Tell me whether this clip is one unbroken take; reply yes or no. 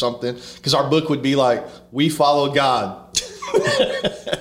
yes